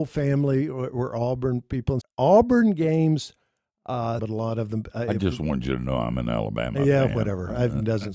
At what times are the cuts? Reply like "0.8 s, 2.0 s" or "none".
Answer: 2.0 s, 4.2 s

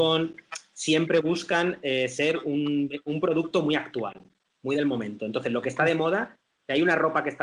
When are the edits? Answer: none

